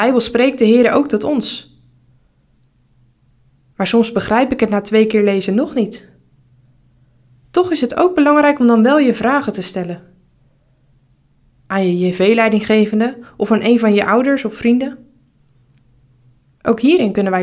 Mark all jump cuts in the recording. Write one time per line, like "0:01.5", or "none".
none